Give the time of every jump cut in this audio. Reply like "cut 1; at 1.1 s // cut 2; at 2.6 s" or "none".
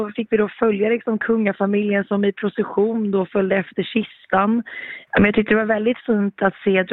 cut 1; at 5.1 s